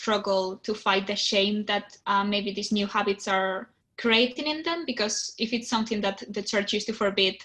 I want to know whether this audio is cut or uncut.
uncut